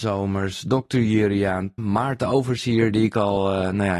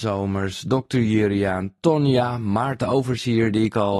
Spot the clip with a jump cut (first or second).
first